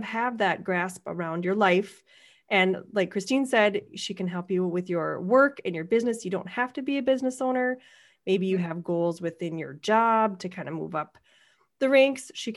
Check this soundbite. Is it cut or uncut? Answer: uncut